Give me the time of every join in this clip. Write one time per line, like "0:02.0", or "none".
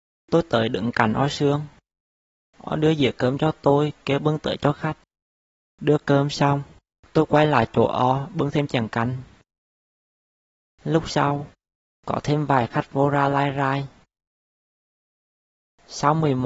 none